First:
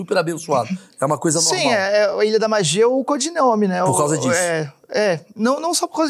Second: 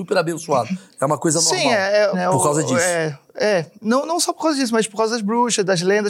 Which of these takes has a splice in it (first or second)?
second